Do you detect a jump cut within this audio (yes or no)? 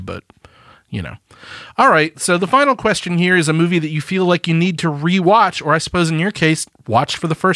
no